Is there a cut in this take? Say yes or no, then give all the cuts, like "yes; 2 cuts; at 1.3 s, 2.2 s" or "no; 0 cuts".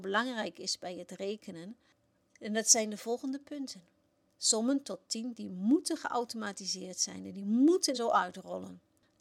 yes; 1 cut; at 7.9 s